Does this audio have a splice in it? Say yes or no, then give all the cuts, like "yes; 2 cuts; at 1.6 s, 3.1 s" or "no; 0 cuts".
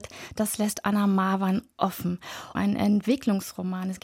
yes; 1 cut; at 2.5 s